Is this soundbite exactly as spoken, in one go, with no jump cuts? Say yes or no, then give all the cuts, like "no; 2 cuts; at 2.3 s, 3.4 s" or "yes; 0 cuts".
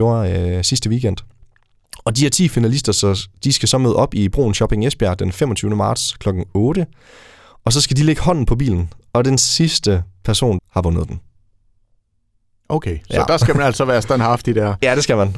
no; 1 cut; at 10.6 s